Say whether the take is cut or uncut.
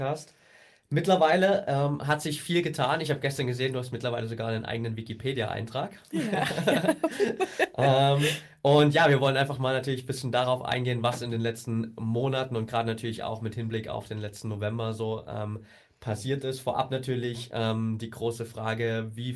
uncut